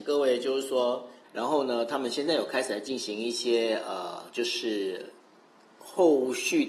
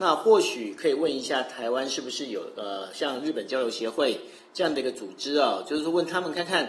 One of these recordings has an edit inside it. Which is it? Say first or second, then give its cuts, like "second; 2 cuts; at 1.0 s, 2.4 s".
first; 1 cut; at 1.2 s